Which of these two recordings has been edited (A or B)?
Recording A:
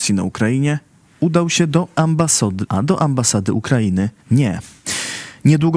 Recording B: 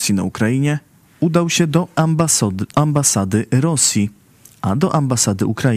A